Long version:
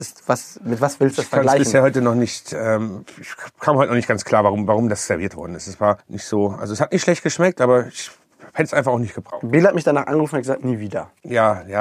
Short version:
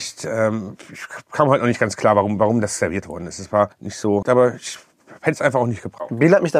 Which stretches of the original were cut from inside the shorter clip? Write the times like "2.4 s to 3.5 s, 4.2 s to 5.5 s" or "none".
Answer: 6.5 s to 7.5 s